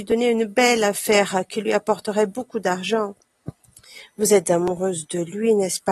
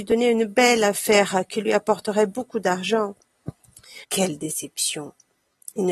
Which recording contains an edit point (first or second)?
second